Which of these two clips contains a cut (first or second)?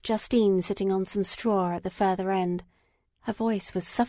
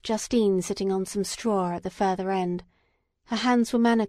first